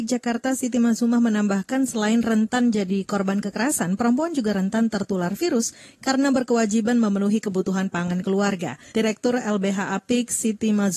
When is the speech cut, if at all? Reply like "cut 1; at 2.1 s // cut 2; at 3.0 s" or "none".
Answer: cut 1; at 8.9 s